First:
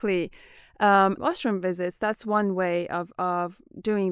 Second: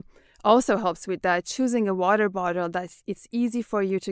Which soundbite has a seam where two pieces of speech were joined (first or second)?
first